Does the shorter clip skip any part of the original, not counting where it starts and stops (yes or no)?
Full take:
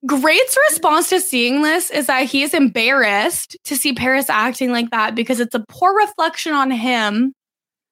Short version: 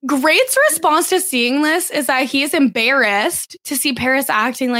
no